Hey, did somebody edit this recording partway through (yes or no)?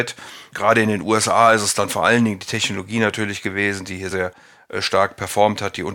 yes